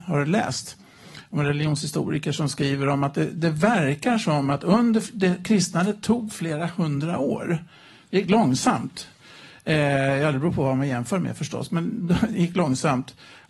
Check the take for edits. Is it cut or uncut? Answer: uncut